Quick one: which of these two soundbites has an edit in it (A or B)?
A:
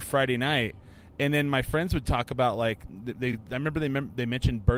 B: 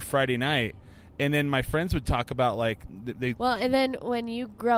B